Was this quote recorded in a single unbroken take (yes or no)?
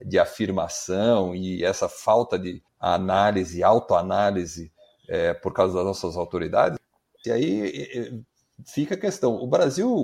no